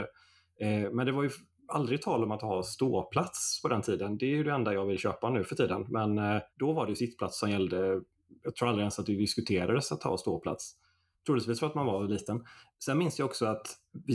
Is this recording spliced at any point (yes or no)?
yes